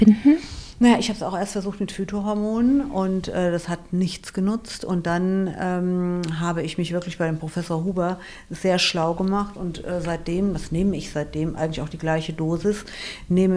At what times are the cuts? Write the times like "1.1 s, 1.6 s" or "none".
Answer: none